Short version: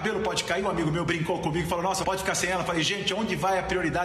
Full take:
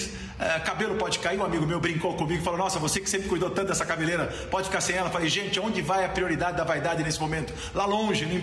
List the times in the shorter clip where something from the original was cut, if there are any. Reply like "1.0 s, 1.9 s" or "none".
2.0 s